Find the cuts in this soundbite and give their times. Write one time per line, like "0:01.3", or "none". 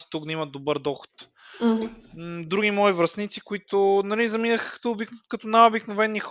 none